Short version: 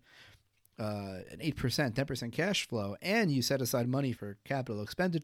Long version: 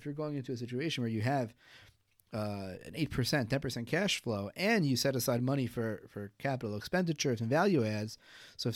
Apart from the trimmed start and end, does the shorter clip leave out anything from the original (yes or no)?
yes